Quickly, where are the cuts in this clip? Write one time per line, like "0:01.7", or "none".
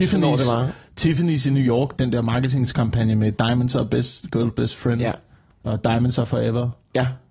0:02.0

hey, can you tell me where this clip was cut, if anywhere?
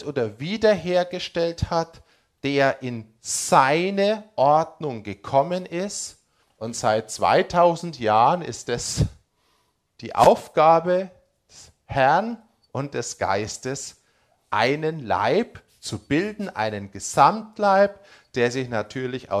0:06.4

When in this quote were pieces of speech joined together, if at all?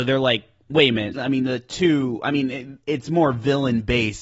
0:01.1
0:02.8

